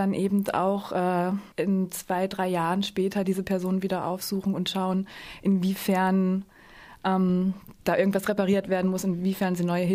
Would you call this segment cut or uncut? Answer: cut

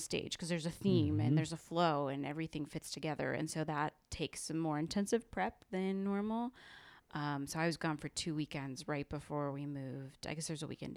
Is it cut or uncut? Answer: uncut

